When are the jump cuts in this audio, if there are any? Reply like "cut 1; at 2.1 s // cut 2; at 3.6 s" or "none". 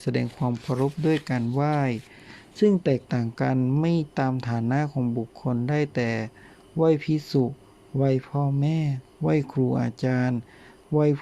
none